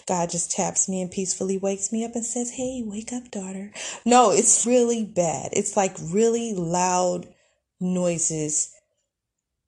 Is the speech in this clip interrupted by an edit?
yes; 1 cut; at 4.6 s

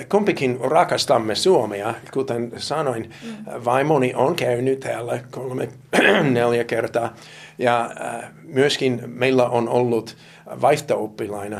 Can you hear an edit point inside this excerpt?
no; 0 cuts

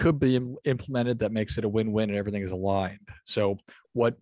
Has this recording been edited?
no; 0 cuts

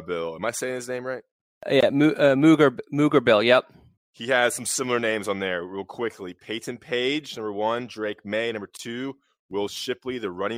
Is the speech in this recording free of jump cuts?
no; 1 cut; at 4.0 s

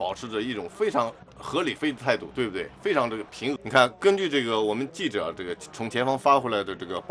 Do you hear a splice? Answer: yes; 1 cut; at 3.6 s

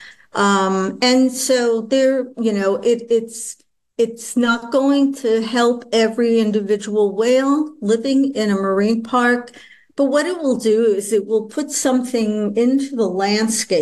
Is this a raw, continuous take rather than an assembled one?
yes; 0 cuts

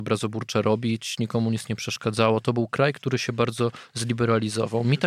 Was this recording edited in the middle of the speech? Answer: no; 0 cuts

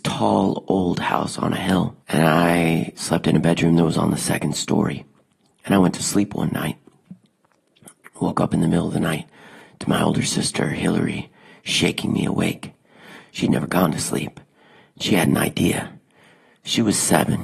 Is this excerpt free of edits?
no; 1 cut; at 2.0 s

